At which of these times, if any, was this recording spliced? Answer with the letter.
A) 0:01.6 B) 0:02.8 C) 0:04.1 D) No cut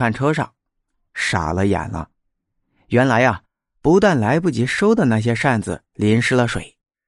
D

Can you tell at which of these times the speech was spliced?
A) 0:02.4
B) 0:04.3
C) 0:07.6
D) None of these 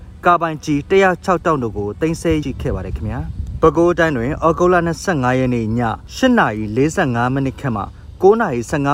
A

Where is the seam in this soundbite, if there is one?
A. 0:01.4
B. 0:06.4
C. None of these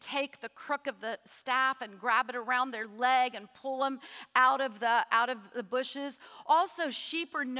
C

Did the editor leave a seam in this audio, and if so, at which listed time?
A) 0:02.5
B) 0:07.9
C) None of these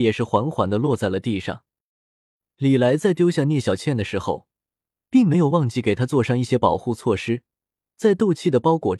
C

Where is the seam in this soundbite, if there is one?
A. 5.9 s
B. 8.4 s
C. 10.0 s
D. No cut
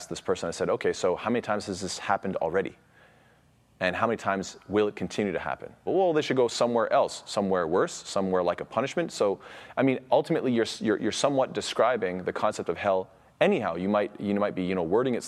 A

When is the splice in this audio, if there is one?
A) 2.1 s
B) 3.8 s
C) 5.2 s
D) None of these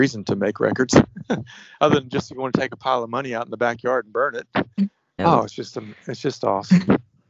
C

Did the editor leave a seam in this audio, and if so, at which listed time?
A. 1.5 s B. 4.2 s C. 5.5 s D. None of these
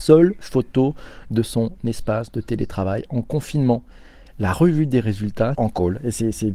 C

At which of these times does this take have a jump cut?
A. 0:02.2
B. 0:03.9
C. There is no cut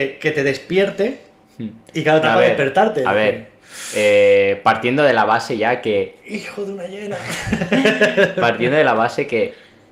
A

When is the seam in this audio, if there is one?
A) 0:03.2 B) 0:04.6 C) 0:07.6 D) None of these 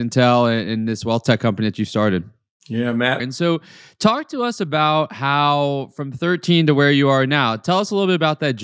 A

